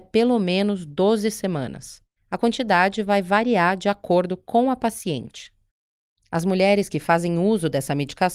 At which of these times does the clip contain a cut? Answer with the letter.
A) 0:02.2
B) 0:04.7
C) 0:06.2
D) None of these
A